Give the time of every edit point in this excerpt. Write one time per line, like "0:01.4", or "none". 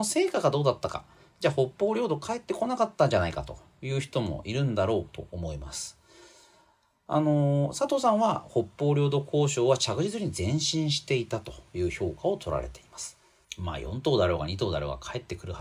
0:13.4